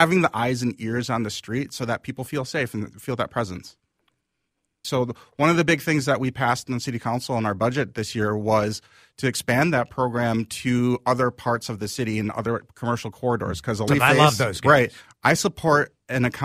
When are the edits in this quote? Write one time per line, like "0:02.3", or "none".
0:04.8
0:13.9
0:15.0